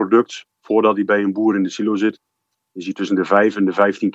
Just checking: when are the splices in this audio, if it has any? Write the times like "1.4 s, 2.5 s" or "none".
none